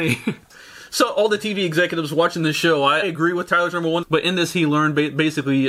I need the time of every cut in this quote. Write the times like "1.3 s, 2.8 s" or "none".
3.0 s, 4.0 s